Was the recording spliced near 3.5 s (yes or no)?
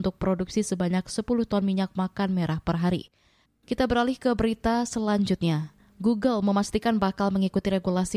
yes